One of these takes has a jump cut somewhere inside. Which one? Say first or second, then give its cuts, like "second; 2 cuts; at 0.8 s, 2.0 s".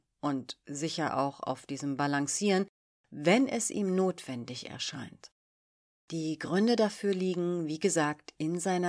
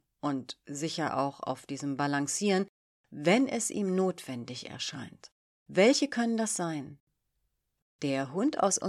second; 1 cut; at 5.5 s